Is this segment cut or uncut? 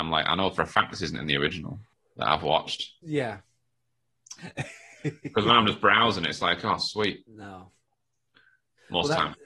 cut